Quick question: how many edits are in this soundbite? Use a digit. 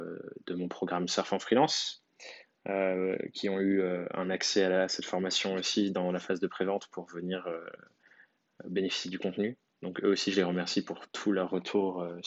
1